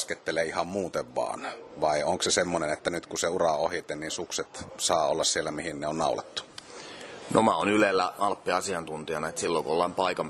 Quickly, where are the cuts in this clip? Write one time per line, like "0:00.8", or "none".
none